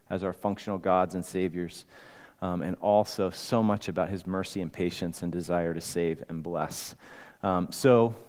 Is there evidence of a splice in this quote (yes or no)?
no